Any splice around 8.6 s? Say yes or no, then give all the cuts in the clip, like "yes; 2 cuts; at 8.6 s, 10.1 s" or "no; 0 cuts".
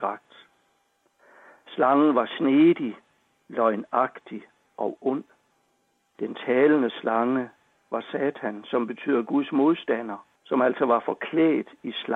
no; 2 cuts; at 6.1 s, 10.4 s